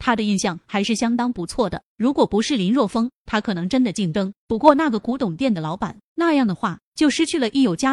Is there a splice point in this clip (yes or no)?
no